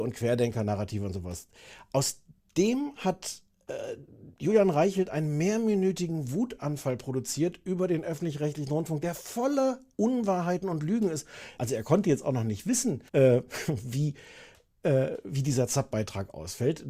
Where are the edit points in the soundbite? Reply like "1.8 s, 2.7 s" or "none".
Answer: 11.6 s, 13.1 s